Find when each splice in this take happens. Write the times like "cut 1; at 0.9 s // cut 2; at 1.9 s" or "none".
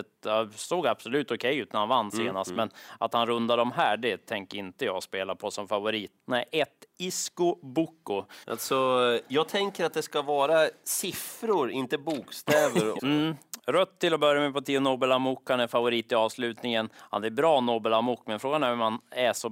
cut 1; at 8.4 s // cut 2; at 13.0 s